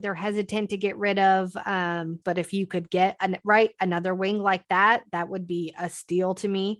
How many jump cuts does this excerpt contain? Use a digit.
1